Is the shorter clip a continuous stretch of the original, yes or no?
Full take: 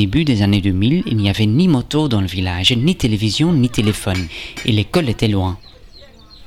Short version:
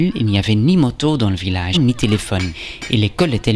no